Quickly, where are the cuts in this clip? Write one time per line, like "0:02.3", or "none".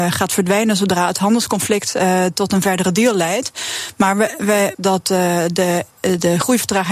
0:04.7